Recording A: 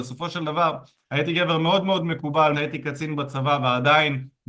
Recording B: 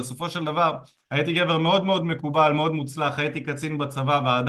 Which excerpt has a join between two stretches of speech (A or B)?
A